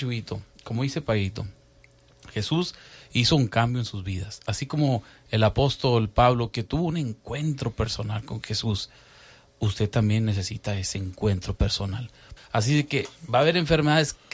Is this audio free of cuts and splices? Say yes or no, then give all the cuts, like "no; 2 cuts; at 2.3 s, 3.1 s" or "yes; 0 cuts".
no; 1 cut; at 12.4 s